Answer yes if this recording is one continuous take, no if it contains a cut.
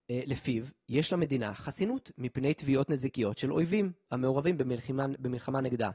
yes